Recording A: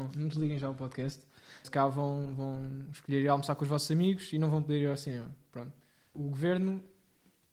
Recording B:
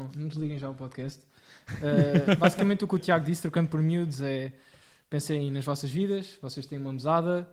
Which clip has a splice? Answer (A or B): A